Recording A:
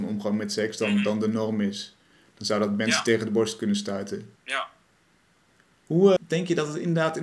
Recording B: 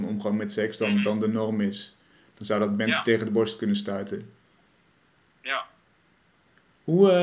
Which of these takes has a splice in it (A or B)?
A